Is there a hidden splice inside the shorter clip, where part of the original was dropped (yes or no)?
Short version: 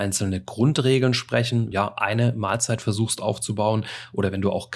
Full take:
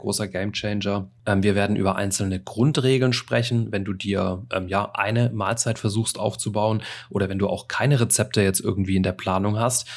yes